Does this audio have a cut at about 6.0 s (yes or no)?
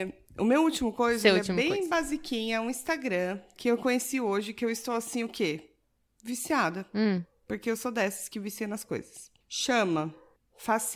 no